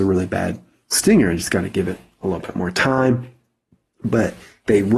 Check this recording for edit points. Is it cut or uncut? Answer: uncut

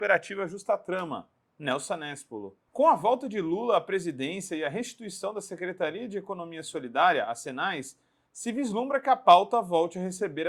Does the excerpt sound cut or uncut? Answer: uncut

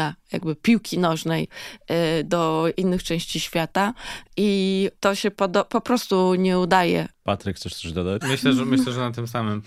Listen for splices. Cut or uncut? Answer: cut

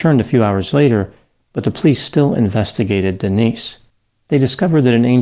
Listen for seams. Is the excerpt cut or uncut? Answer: uncut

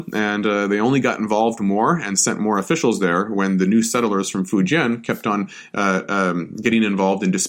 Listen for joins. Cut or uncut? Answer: uncut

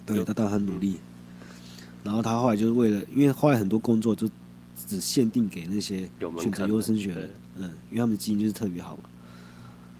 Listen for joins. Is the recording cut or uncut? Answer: uncut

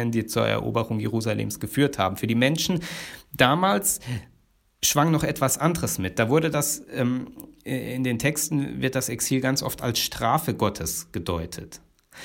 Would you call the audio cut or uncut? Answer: uncut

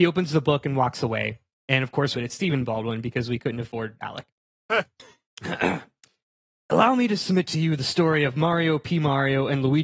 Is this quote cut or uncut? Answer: cut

